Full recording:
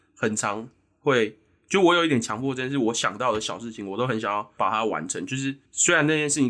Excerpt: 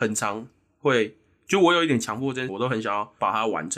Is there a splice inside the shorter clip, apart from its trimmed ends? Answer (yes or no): yes